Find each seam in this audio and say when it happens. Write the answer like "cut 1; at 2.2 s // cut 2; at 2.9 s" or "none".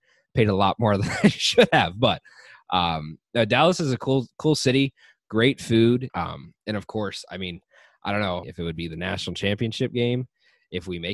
cut 1; at 6.1 s // cut 2; at 8.4 s